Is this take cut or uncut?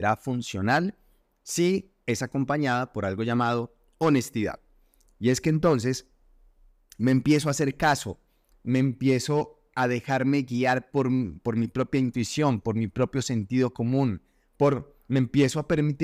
cut